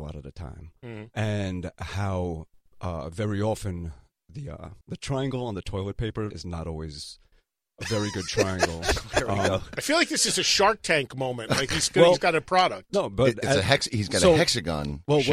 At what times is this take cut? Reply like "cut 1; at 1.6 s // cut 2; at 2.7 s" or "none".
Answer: cut 1; at 4.8 s // cut 2; at 6.3 s